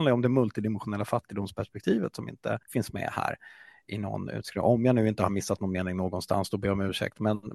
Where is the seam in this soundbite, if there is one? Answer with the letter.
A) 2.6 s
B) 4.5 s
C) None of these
A